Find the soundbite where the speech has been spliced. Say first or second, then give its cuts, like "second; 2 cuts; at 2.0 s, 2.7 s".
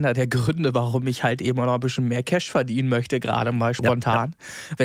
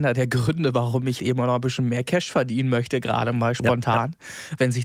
second; 1 cut; at 1.2 s